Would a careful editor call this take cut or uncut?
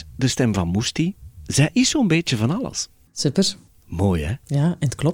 cut